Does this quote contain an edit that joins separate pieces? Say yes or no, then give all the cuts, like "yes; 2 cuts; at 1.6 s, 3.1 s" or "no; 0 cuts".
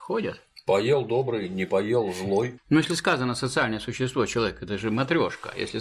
yes; 1 cut; at 2.6 s